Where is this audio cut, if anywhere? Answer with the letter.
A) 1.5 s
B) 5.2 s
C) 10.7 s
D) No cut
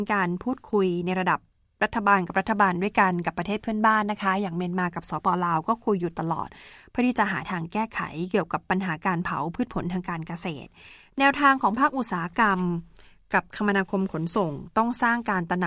B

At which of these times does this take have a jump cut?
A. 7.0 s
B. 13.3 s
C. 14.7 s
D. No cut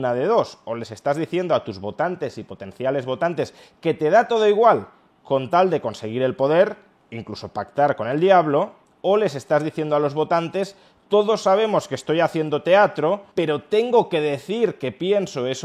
B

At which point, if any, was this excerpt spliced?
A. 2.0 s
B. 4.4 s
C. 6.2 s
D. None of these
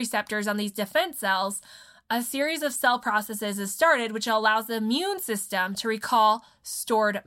D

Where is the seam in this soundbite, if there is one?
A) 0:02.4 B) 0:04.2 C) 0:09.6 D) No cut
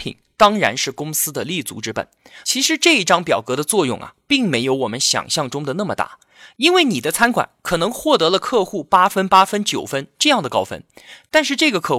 A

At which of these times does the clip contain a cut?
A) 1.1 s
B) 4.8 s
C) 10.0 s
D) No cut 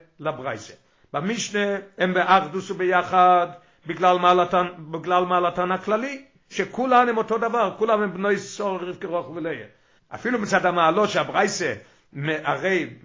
C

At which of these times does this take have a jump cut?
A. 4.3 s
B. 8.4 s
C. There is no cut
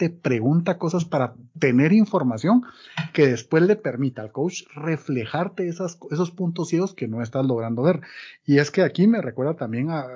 C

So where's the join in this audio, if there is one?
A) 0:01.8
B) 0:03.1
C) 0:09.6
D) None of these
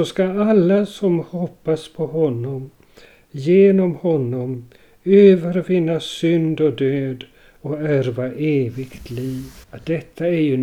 C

